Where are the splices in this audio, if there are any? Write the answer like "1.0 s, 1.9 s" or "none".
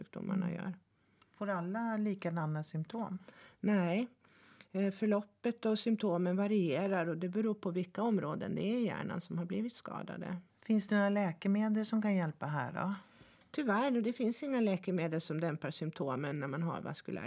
10.5 s